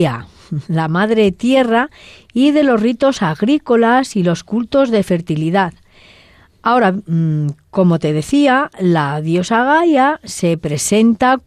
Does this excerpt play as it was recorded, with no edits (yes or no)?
yes